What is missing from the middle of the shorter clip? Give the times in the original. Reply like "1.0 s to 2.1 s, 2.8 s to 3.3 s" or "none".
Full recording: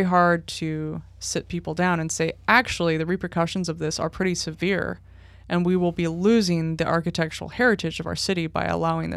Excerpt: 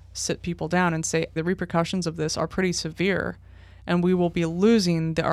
2.4 s to 3.0 s